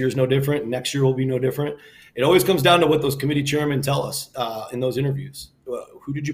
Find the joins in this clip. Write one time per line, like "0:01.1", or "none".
none